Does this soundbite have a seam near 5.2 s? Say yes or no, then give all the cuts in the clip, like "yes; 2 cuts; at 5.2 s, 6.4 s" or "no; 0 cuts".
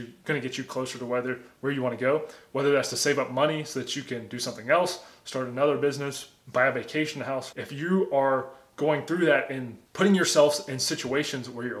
no; 2 cuts; at 7.5 s, 9.9 s